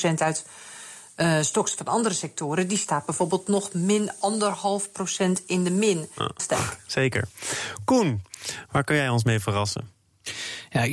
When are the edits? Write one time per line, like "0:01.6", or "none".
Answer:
0:06.4